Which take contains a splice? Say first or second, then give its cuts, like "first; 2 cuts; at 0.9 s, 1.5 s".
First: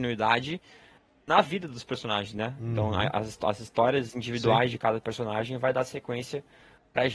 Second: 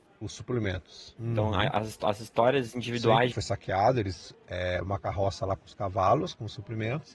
second; 3 cuts; at 1.2 s, 3.3 s, 4.3 s